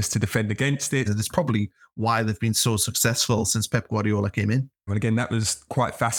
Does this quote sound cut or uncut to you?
cut